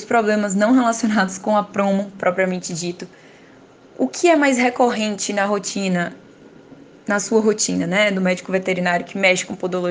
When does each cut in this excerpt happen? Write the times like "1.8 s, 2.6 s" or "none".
none

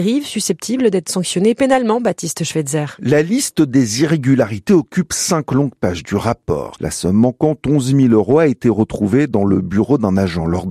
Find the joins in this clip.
6.8 s

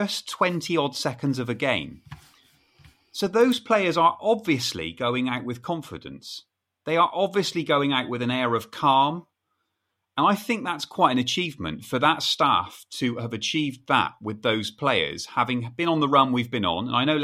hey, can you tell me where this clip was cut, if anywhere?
none

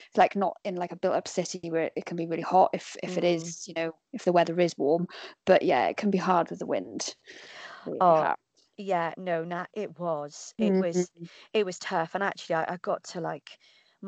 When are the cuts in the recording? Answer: none

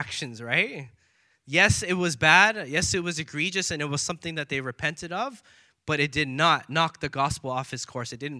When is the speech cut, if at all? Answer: none

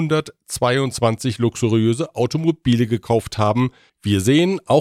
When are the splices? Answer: 3.9 s

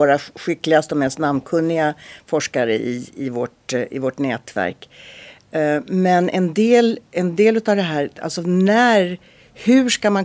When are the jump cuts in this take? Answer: none

